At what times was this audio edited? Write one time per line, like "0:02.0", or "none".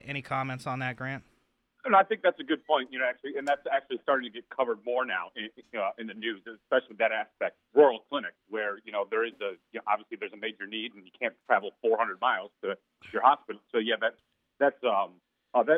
0:07.7
0:13.6